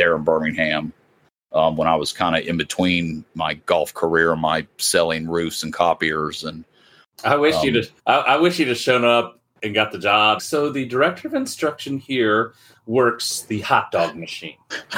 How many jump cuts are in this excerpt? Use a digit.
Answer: 2